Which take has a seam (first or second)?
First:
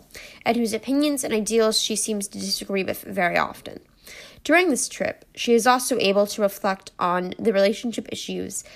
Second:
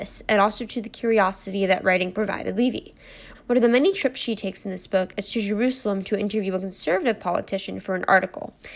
second